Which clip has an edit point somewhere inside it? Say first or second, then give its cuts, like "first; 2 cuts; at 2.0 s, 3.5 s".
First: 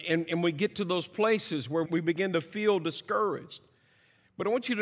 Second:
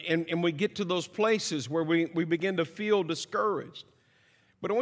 first; 1 cut; at 1.9 s